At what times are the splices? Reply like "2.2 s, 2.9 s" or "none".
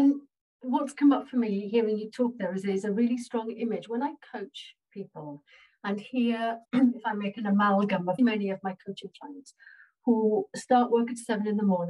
6.6 s, 8.2 s